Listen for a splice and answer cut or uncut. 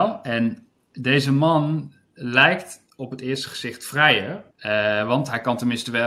cut